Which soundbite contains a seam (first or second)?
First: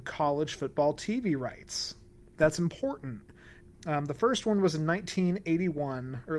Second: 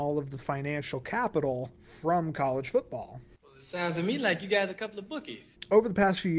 first